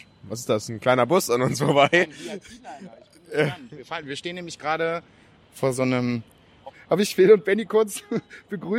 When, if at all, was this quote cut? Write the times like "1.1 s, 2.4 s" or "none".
5.4 s, 6.7 s